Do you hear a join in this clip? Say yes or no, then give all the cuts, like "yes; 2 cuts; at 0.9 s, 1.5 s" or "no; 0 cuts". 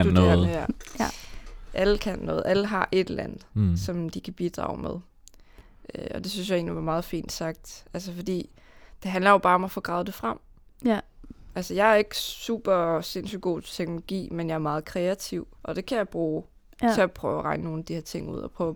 yes; 1 cut; at 15.5 s